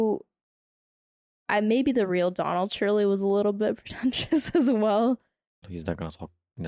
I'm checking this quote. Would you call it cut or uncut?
cut